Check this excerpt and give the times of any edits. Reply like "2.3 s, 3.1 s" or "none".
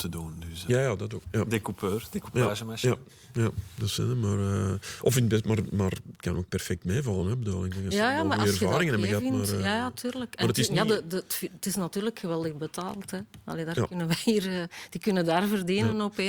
1.2 s